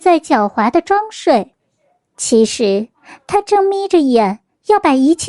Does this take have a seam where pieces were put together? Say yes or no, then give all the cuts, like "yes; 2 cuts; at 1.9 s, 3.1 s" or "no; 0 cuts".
no; 0 cuts